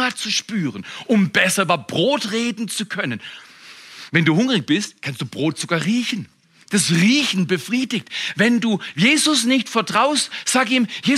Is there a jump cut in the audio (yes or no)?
no